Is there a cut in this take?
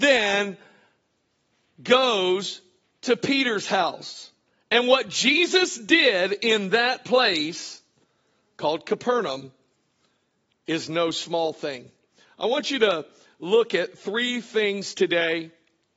no; 0 cuts

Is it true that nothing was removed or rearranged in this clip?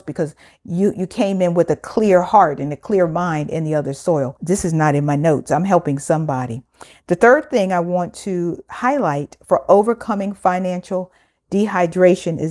yes; 0 cuts

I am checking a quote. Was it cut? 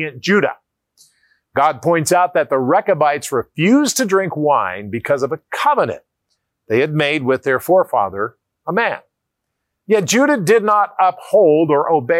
yes; 1 cut; at 8.6 s

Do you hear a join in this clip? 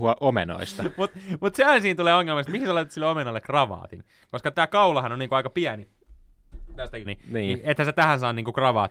yes; 2 cuts; at 4.5 s, 7.0 s

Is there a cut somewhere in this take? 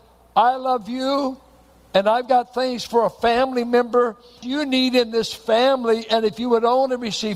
yes; 1 cut; at 4.4 s

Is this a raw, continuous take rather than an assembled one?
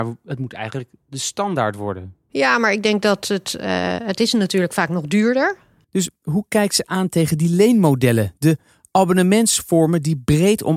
no; 1 cut; at 5.8 s

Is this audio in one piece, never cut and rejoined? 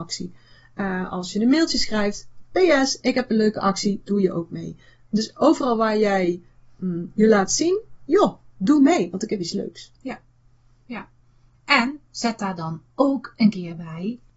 no; 1 cut; at 8.1 s

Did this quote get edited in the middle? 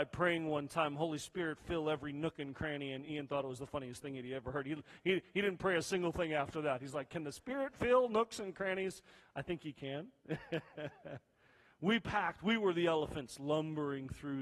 no; 0 cuts

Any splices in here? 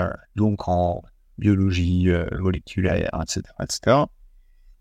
no; 0 cuts

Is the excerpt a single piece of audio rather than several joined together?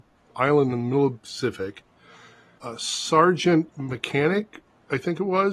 no; 2 cuts; at 2.6 s, 3.7 s

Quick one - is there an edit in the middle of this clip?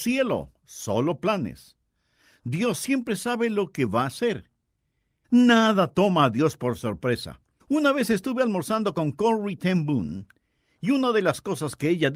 yes; 2 cuts; at 5.2 s, 7.6 s

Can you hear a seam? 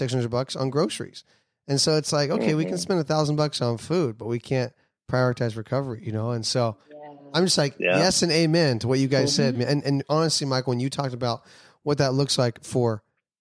no; 0 cuts

